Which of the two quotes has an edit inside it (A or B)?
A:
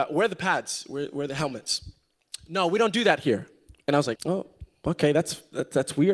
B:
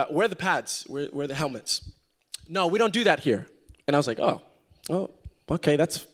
A